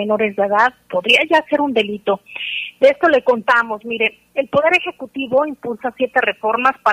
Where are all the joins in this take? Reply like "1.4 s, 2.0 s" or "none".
none